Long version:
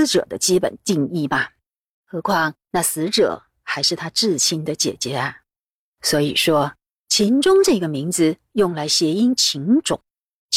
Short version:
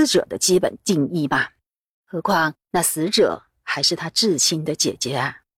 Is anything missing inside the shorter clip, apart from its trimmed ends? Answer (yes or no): no